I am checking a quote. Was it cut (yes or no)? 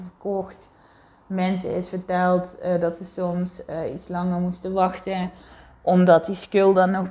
no